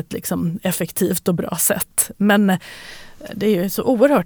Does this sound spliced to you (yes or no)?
no